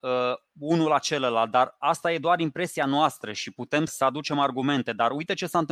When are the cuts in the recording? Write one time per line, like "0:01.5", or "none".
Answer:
0:03.9